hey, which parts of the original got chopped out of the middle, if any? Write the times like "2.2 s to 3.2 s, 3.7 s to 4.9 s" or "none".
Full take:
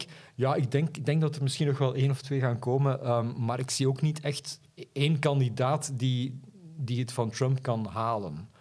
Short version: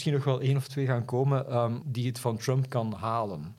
3.4 s to 6.7 s

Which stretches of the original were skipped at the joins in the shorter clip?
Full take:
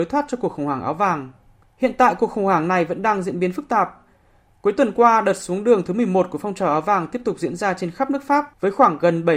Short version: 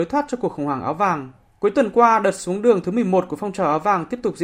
1.4 s to 4.5 s

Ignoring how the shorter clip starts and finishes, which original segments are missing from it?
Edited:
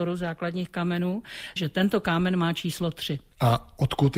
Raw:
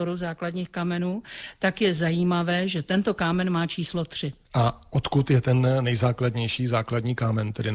1.6 s to 2.7 s

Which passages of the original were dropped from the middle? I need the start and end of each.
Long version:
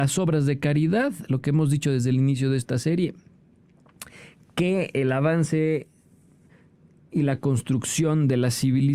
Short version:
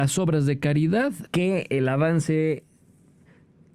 1.3 s to 4.5 s

